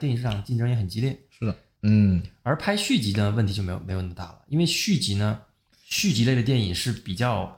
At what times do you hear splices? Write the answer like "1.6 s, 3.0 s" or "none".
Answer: 1.8 s, 5.7 s